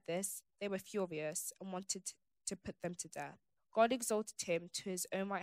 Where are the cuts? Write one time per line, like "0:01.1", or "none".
0:03.6